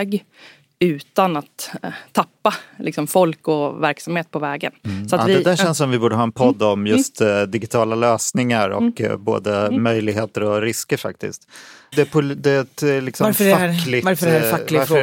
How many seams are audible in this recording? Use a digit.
1